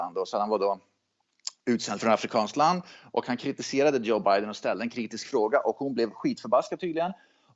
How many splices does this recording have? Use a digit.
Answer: 0